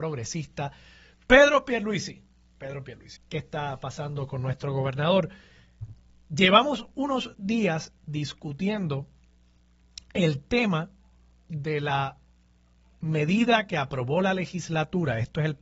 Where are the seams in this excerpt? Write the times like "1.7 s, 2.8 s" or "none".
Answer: 3.2 s